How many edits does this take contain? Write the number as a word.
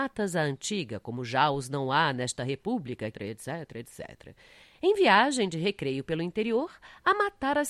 one